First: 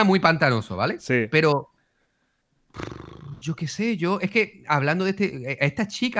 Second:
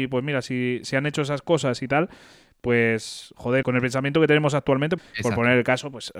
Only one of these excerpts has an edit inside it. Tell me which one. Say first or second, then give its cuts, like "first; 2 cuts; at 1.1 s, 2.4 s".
second; 2 cuts; at 3.6 s, 5.0 s